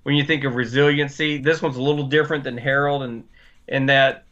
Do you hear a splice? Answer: no; 0 cuts

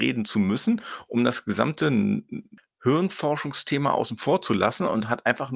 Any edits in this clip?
no; 0 cuts

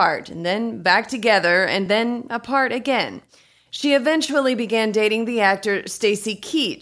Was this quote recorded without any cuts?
yes; 0 cuts

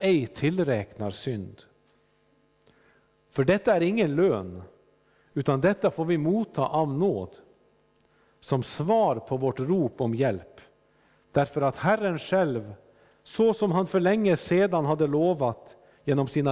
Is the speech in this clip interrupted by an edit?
no; 0 cuts

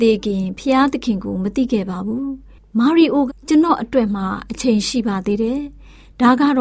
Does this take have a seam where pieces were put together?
yes; 1 cut; at 3.3 s

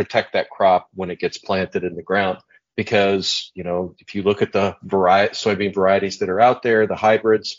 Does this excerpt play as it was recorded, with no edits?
no; 1 cut; at 2.7 s

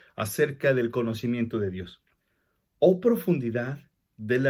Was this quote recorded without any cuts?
yes; 0 cuts

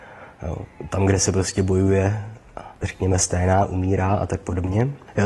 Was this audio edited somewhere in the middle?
no; 0 cuts

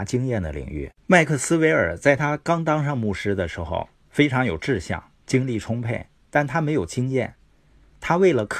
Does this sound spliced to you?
yes; 1 cut; at 1.0 s

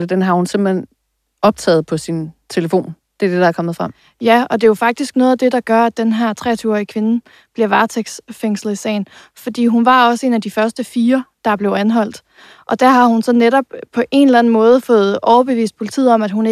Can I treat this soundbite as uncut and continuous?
yes; 0 cuts

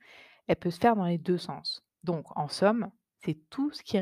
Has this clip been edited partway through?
yes; 1 cut; at 1.9 s

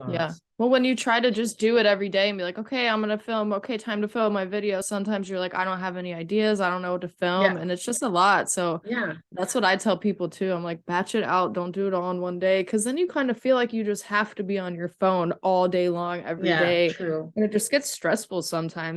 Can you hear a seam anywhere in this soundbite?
no; 0 cuts

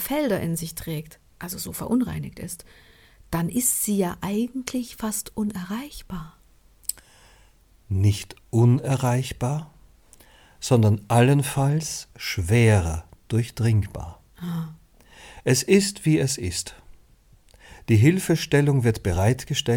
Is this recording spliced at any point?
no; 0 cuts

